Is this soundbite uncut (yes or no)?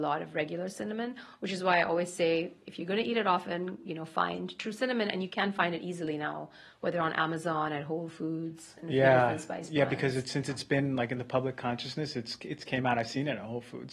yes